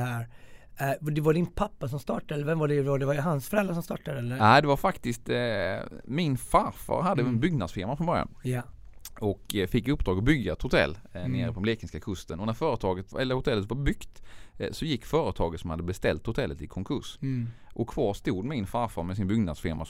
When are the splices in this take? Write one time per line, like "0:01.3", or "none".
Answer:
0:13.1